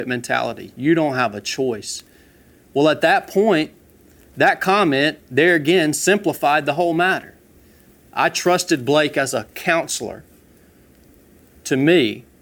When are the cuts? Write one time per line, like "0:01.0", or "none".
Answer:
none